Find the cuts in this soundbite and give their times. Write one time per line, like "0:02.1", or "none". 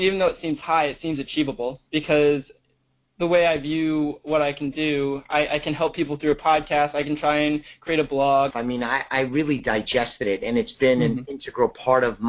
0:01.9
0:08.5